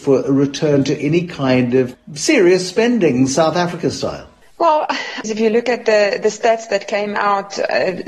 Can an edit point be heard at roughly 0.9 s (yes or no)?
no